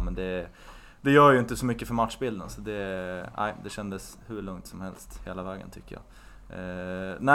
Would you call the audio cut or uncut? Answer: uncut